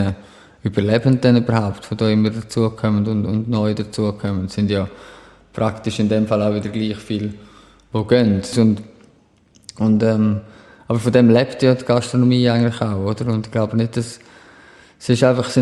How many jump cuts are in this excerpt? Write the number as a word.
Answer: one